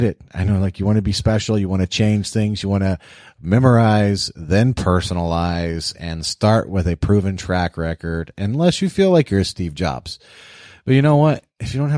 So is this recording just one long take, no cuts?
yes; 0 cuts

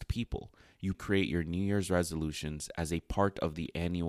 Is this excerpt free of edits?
no; 1 cut; at 0.9 s

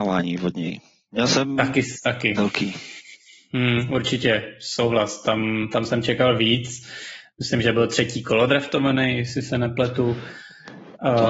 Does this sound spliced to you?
no; 0 cuts

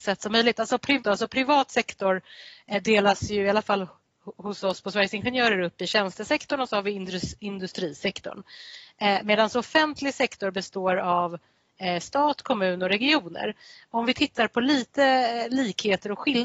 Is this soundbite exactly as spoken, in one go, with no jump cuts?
no; 1 cut; at 1.0 s

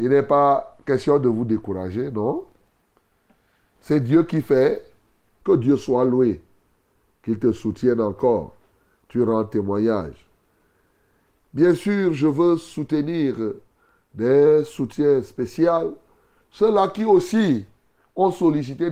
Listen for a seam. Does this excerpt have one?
yes; 1 cut; at 5.4 s

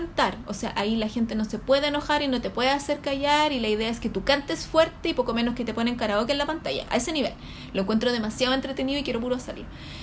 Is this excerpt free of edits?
yes; 0 cuts

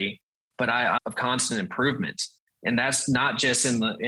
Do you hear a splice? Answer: yes; 1 cut; at 1.0 s

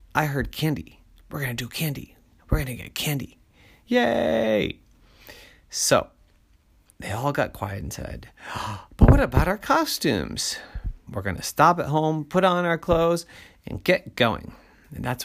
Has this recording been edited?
yes; 1 cut; at 11.1 s

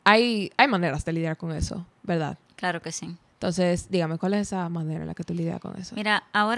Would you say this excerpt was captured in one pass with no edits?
yes; 0 cuts

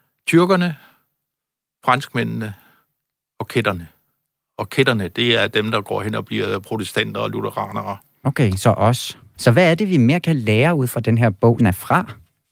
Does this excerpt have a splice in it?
yes; 2 cuts; at 9.3 s, 11.6 s

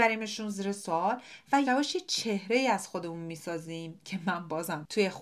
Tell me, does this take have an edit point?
yes; 1 cut; at 1.7 s

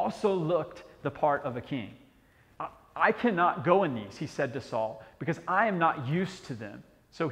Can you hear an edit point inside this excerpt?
yes; 1 cut; at 2.5 s

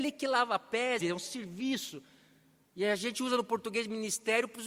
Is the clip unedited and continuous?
no; 1 cut; at 1.0 s

